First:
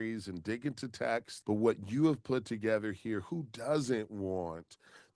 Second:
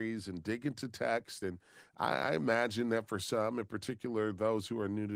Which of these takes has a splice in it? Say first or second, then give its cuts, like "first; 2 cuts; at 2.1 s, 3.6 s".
first; 1 cut; at 1.4 s